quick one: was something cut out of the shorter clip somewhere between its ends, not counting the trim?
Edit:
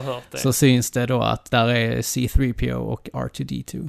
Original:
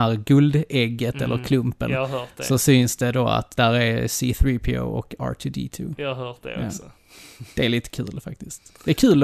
no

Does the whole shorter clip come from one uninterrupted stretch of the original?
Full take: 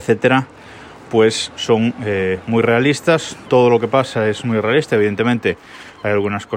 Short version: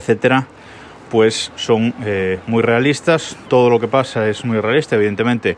yes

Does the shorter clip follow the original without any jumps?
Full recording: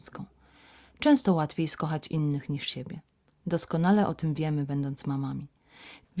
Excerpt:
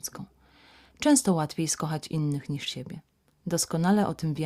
yes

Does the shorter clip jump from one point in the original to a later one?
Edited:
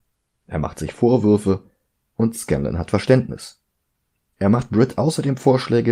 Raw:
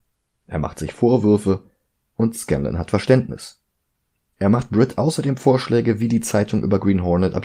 no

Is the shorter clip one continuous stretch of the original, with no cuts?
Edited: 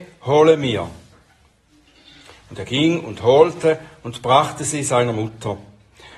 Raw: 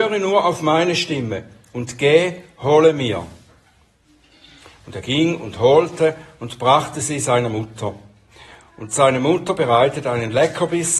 yes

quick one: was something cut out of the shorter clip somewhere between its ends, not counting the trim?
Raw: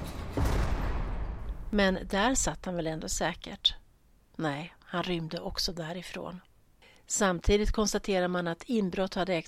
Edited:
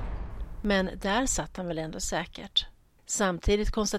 yes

